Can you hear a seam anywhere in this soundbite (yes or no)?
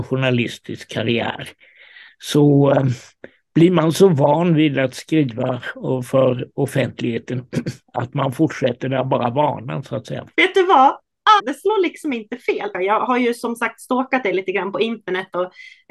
yes